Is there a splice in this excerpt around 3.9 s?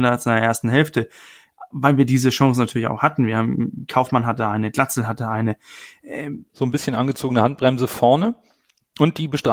no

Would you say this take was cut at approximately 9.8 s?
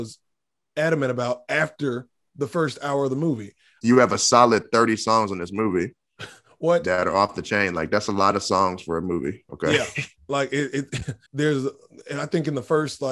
no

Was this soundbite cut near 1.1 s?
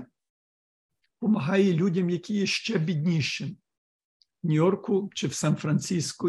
no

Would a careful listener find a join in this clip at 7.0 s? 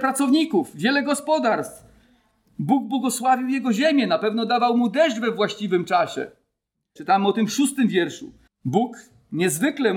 yes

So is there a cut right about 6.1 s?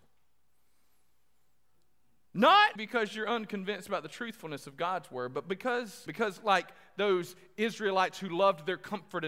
yes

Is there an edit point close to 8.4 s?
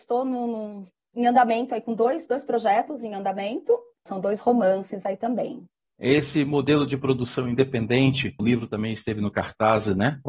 yes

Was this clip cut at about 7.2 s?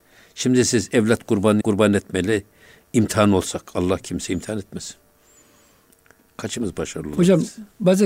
no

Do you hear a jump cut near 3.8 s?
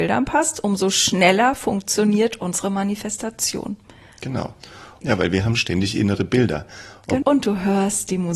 no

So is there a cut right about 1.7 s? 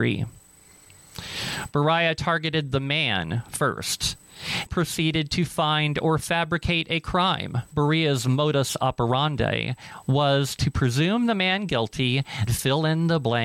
no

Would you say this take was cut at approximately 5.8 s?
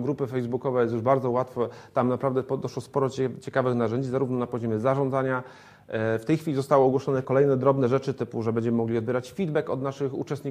no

